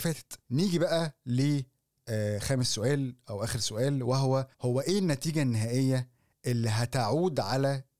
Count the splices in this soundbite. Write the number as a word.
one